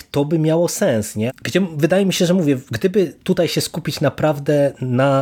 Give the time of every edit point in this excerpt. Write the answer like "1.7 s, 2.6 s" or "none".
1.3 s